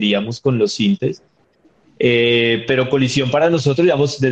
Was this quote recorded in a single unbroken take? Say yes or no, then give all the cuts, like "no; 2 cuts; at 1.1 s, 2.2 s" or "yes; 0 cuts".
yes; 0 cuts